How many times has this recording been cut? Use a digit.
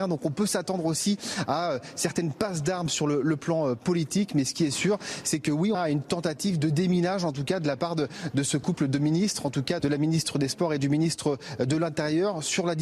2